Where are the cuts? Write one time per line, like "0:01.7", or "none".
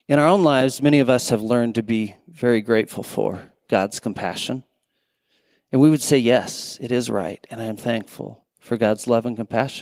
0:07.8